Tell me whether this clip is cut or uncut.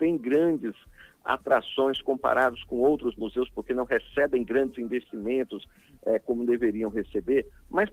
uncut